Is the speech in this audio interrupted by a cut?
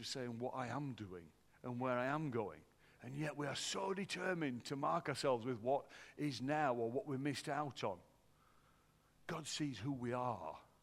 no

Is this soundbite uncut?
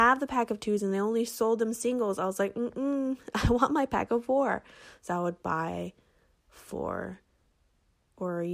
yes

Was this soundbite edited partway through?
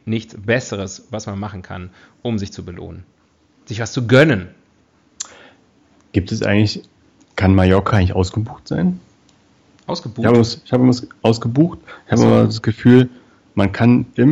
no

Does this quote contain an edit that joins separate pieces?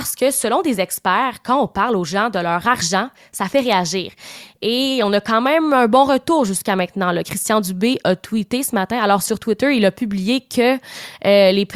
no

